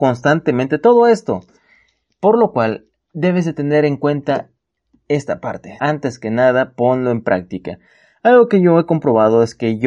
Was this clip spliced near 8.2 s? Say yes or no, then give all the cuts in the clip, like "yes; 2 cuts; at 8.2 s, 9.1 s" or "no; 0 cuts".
no; 1 cut; at 5.8 s